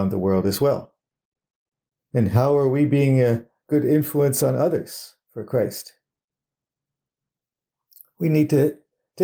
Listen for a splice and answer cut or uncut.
cut